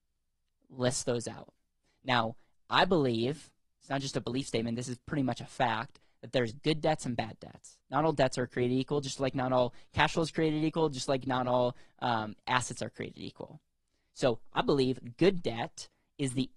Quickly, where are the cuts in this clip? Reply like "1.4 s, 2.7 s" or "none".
none